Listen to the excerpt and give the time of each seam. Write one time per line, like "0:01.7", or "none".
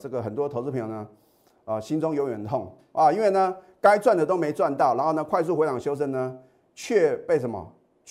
none

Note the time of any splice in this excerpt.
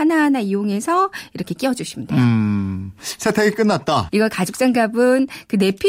0:04.1

